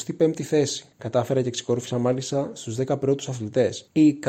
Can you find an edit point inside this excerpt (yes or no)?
yes